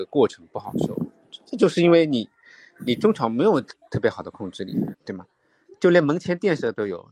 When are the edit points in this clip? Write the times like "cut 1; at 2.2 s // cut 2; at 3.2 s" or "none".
cut 1; at 4.9 s